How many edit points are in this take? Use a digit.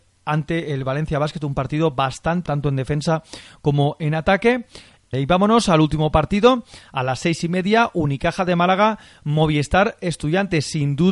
2